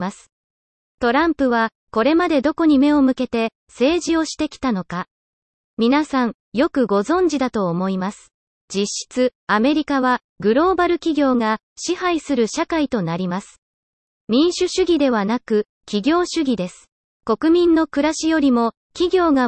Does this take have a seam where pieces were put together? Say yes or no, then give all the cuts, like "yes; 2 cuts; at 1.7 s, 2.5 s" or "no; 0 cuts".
yes; 1 cut; at 8.5 s